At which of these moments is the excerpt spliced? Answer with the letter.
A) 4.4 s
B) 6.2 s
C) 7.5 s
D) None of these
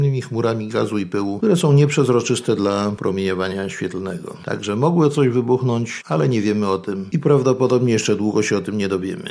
D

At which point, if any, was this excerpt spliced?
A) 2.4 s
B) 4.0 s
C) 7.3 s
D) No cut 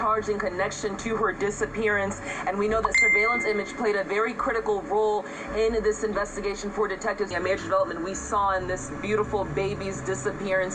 C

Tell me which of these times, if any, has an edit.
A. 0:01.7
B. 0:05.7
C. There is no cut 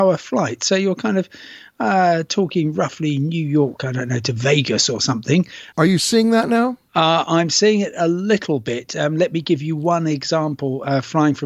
B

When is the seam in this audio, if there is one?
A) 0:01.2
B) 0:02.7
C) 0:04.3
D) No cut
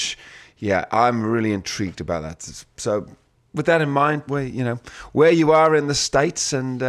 C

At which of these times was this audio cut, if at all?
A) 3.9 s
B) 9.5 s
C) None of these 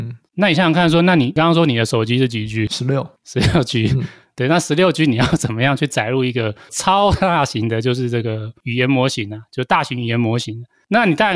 C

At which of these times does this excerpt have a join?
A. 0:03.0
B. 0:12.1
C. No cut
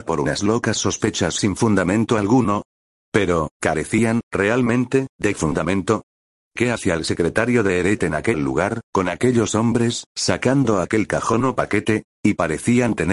B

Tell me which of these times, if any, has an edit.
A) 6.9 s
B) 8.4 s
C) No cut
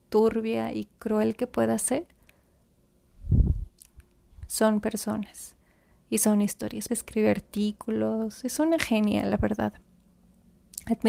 A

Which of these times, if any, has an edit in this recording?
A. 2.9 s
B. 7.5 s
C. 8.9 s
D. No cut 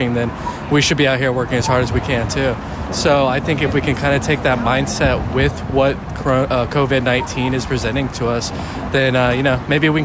A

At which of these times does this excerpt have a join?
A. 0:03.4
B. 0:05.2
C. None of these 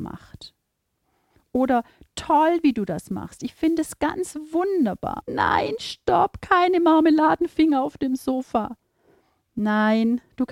B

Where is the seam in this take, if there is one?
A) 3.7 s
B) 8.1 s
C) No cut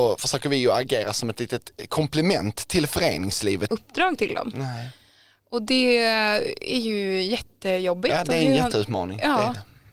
A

